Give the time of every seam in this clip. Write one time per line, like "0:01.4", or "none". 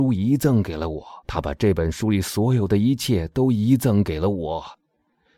0:01.2